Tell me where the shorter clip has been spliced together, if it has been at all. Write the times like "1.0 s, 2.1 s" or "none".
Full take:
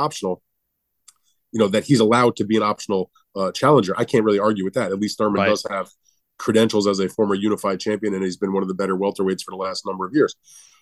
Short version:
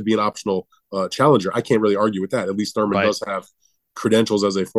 none